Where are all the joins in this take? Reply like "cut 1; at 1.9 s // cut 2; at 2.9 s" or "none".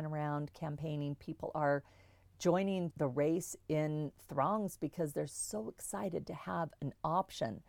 cut 1; at 2.9 s

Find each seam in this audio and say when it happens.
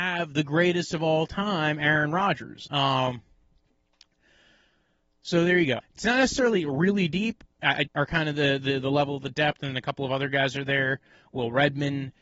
cut 1; at 2.7 s // cut 2; at 5.8 s // cut 3; at 7.9 s

